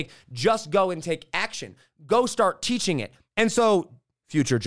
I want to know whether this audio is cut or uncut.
cut